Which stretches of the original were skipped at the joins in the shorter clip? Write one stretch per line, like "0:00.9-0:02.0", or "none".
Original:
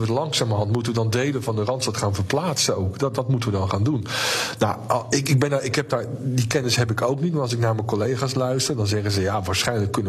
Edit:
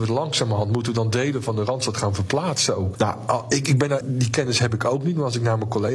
0:02.9-0:04.6
0:05.6-0:06.2